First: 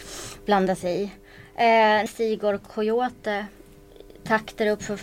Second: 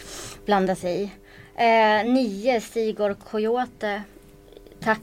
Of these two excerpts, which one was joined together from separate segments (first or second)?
first